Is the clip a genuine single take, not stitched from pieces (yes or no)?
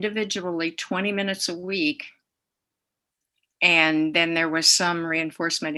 yes